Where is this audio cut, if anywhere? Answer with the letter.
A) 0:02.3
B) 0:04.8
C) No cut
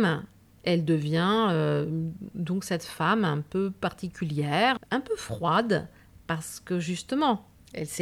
B